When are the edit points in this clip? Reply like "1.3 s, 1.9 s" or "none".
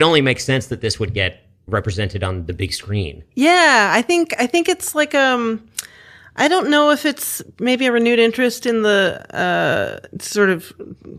none